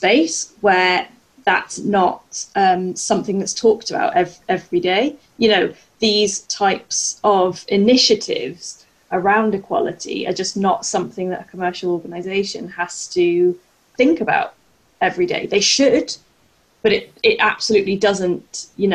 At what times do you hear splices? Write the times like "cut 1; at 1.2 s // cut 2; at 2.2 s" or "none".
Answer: cut 1; at 9.1 s